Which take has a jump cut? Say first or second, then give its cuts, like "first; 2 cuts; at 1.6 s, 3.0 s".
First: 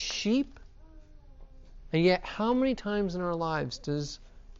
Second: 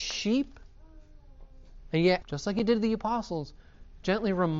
second; 1 cut; at 2.2 s